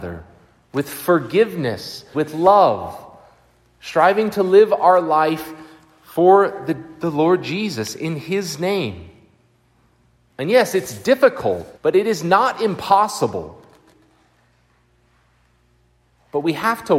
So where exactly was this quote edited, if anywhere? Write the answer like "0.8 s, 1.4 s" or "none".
2.1 s, 10.3 s, 11.8 s

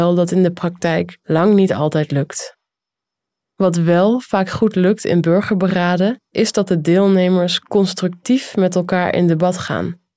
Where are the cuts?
none

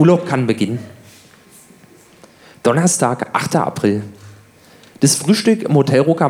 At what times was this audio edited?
none

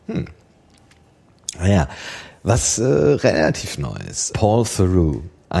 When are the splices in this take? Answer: 4.3 s

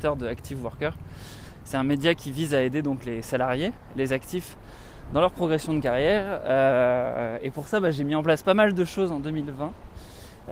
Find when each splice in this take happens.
none

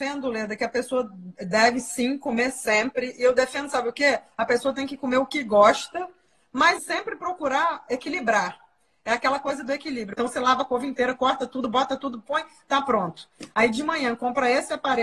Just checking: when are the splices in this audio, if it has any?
6.8 s, 10.1 s

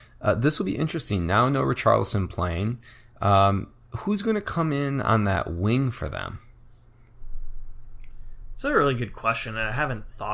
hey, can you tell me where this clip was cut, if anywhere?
none

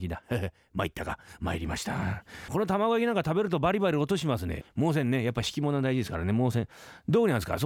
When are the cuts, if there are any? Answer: 2.5 s, 4.6 s

